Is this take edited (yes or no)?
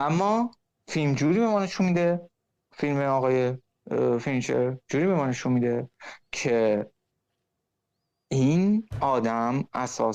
no